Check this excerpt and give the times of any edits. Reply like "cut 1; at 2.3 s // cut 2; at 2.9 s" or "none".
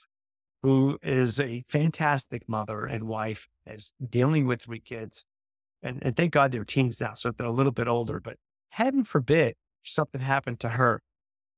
none